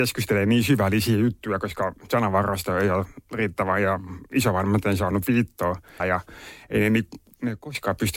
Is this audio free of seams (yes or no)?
no